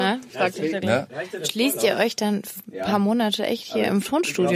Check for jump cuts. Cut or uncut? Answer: uncut